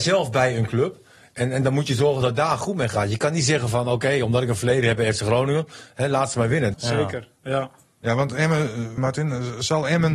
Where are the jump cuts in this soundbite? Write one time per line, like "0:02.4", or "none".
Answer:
0:06.7
0:09.0